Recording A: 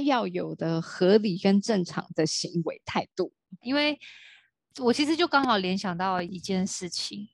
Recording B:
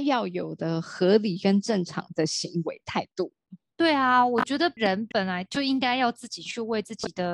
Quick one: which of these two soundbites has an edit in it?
A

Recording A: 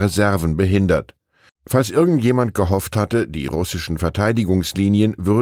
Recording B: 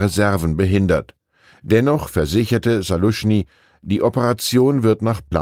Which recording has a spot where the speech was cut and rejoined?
A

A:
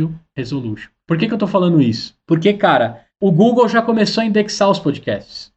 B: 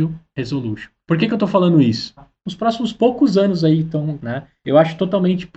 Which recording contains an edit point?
B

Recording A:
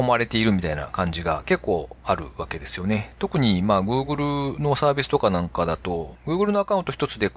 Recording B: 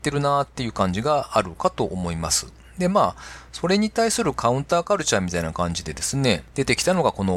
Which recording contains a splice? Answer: A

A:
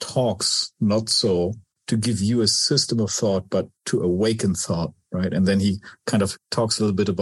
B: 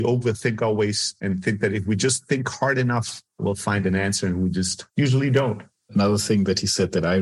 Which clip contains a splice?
B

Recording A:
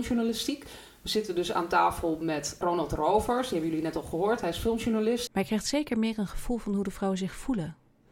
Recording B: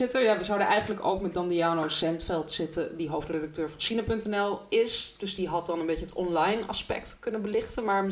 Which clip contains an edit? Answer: A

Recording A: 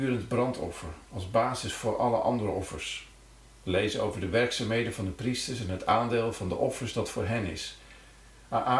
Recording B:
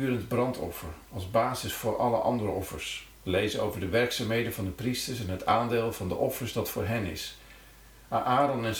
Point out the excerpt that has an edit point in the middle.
B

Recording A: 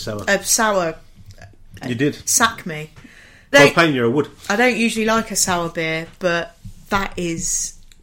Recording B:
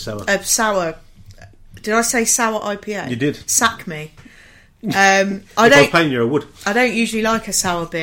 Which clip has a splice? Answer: A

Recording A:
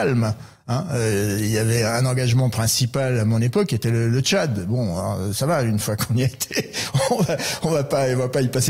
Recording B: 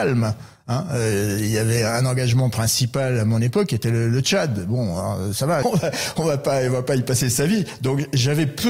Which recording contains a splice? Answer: B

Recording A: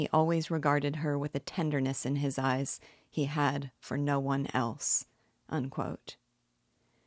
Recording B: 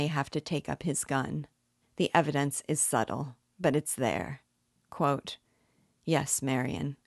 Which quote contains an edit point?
B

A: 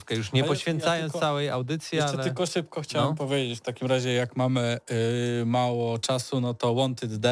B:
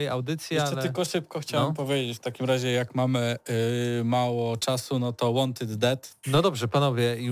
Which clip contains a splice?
B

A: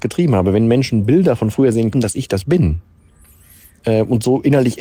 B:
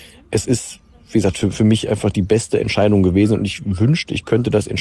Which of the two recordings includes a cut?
A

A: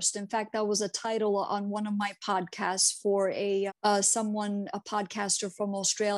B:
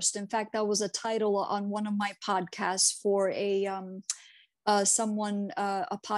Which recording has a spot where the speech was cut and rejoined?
A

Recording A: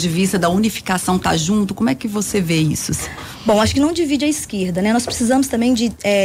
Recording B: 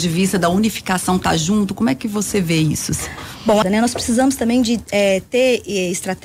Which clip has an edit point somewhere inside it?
B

